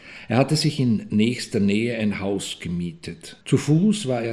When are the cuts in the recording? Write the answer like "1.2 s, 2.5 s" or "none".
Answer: 3.4 s